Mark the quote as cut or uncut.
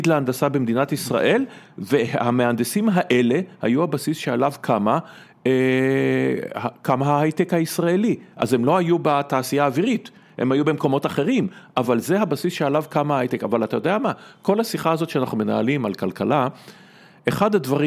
uncut